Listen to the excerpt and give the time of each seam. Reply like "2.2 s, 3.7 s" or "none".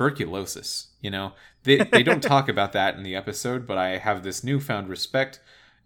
1.8 s